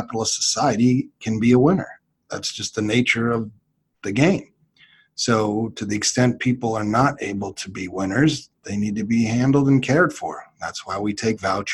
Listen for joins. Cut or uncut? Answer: uncut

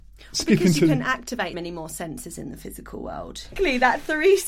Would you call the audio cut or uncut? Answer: cut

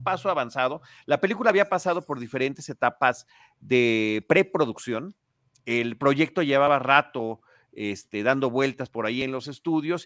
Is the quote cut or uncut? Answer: uncut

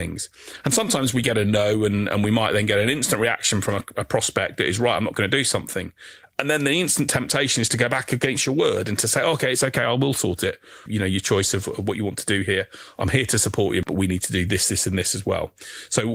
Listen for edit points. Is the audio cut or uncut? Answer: cut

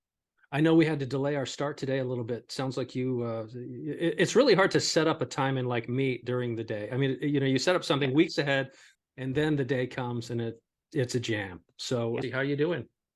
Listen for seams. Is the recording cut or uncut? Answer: cut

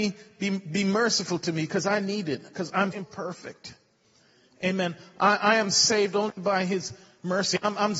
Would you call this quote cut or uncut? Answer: cut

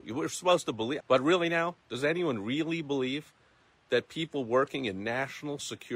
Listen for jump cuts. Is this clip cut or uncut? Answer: cut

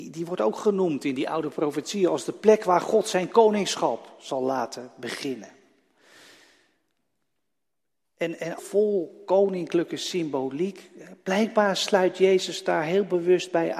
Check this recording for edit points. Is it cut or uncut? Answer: cut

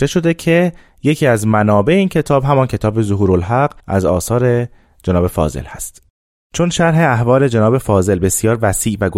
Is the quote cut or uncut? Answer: cut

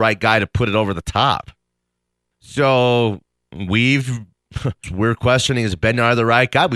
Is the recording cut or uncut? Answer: cut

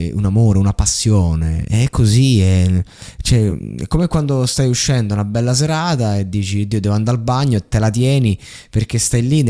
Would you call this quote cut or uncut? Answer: uncut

